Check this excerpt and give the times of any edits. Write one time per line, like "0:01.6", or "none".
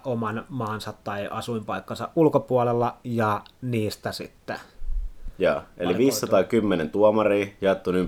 0:03.0